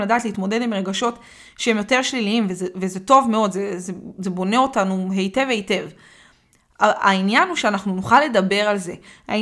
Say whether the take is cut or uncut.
uncut